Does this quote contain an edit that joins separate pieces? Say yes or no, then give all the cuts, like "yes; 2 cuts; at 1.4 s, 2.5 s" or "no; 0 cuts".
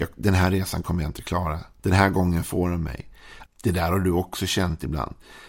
yes; 2 cuts; at 1.8 s, 3.5 s